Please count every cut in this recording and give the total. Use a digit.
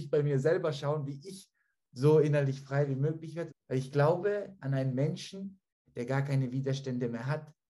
2